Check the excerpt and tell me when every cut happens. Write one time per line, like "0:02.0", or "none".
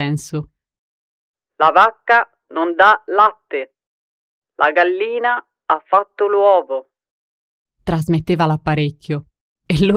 none